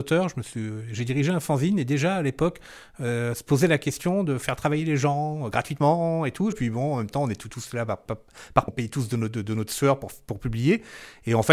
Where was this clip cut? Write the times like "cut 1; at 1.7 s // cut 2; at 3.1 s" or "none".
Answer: cut 1; at 6.5 s // cut 2; at 8.7 s